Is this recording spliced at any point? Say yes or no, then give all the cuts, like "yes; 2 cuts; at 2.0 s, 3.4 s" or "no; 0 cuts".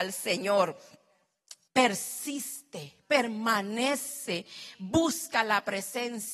yes; 1 cut; at 1.7 s